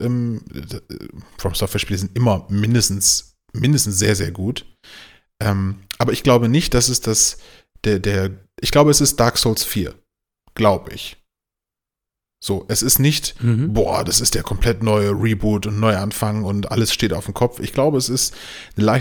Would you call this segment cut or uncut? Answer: uncut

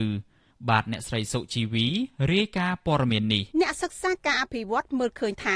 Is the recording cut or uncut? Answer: cut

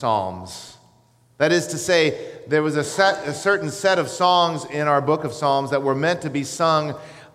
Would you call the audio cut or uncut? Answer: uncut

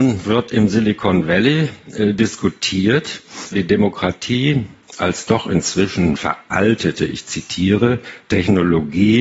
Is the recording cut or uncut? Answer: cut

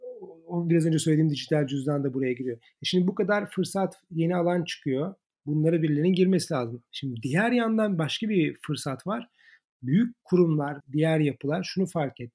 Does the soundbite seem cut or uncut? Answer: cut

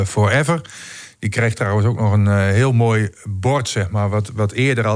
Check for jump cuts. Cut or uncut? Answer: uncut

